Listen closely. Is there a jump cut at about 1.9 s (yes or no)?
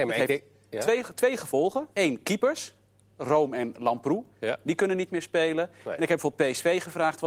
yes